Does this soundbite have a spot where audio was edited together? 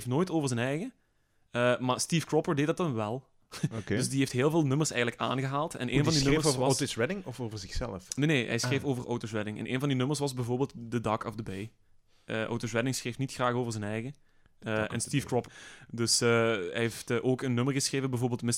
yes; 1 cut; at 15.5 s

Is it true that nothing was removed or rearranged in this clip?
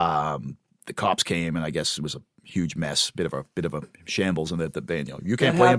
yes; 0 cuts

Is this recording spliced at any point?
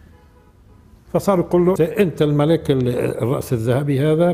yes; 1 cut; at 1.8 s

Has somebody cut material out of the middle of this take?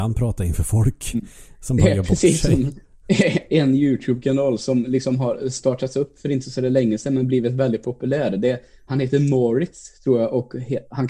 yes; 1 cut; at 8.9 s

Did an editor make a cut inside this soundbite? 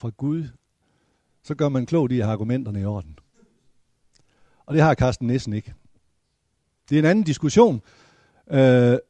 no; 0 cuts

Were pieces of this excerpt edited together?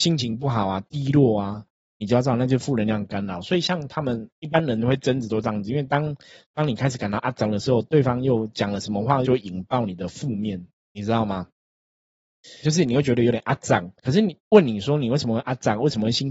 yes; 3 cuts; at 9.2 s, 12.6 s, 14.0 s

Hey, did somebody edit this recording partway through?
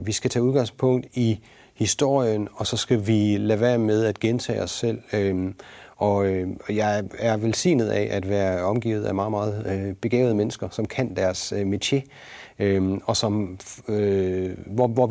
no; 0 cuts

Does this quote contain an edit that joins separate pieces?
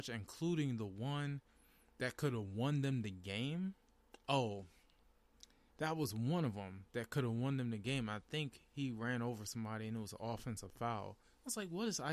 yes; 1 cut; at 5.7 s

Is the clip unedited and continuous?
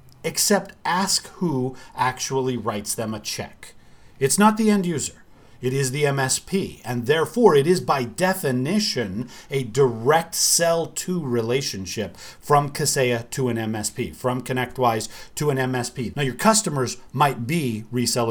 no; 1 cut; at 16.1 s

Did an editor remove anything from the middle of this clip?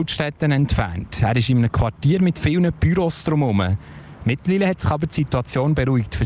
yes; 1 cut; at 4.2 s

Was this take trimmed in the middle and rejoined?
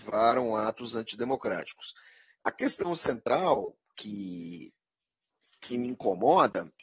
yes; 1 cut; at 2.4 s

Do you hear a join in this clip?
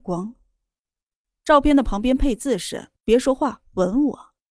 yes; 1 cut; at 3.0 s

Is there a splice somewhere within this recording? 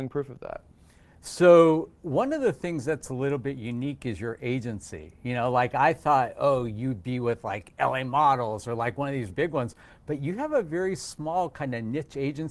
yes; 1 cut; at 9.3 s

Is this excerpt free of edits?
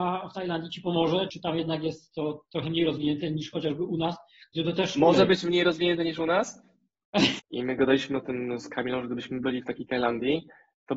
no; 2 cuts; at 1.3 s, 7.4 s

